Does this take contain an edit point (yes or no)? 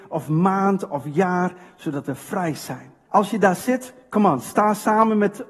yes